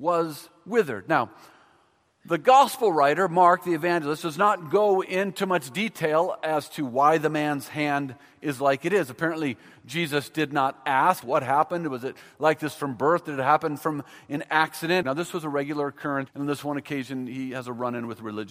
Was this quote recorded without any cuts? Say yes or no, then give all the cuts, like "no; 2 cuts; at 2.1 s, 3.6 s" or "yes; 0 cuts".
no; 3 cuts; at 11.2 s, 15.0 s, 16.3 s